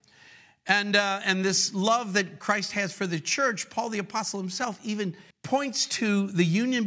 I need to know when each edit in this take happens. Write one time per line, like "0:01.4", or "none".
0:05.3